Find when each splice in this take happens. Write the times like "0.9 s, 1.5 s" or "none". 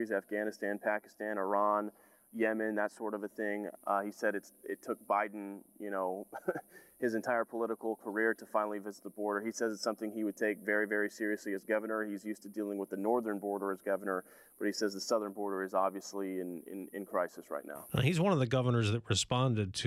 3.8 s